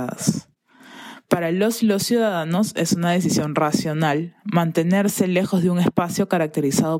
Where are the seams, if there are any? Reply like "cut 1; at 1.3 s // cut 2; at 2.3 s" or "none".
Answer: none